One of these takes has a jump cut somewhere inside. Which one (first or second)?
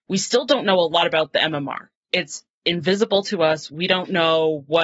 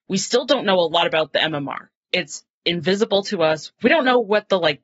second